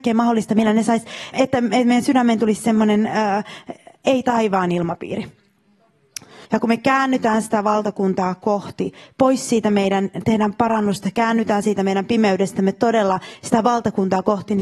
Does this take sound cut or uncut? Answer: cut